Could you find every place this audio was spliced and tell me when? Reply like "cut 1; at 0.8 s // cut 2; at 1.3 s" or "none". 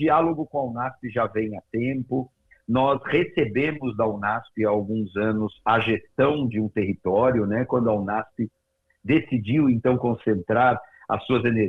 none